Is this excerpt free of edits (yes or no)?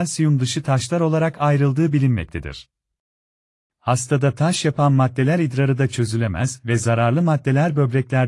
no